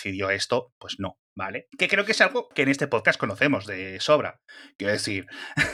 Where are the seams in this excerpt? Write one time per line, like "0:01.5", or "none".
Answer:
0:01.7

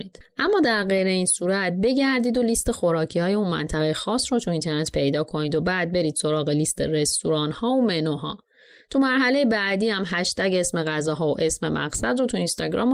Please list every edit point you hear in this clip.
none

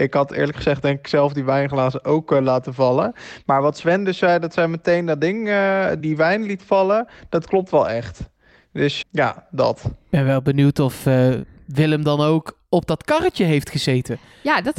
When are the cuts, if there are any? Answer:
0:06.0
0:09.0

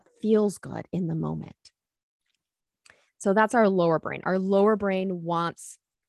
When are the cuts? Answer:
none

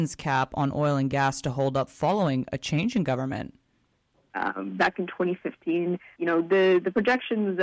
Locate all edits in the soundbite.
0:04.3
0:06.2

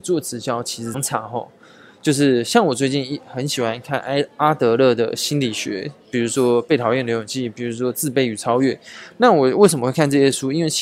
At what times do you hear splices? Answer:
0:00.9

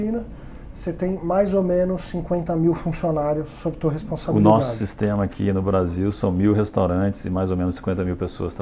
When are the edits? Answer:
none

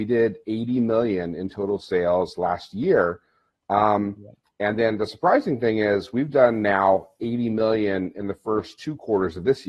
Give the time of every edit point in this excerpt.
none

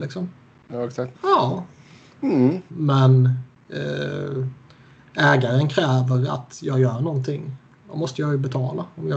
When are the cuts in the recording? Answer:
0:01.1
0:02.7

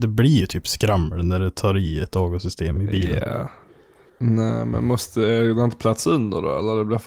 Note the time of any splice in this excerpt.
0:04.1

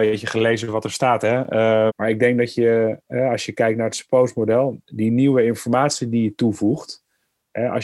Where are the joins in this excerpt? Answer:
0:01.9

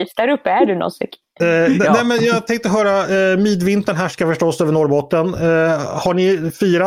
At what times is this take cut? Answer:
none

